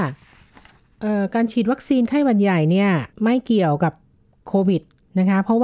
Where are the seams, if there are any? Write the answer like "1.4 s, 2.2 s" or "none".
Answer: 3.1 s